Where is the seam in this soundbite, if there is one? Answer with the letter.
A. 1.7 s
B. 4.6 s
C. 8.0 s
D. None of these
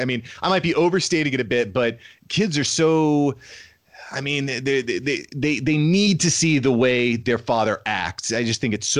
D